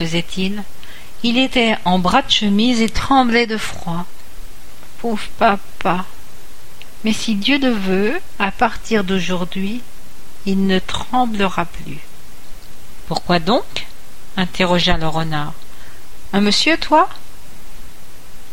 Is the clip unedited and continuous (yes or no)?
no